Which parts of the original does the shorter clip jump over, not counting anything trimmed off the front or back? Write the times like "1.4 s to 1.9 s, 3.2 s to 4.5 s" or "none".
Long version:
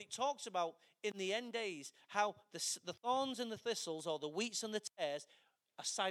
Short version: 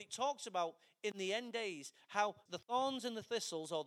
2.5 s to 2.8 s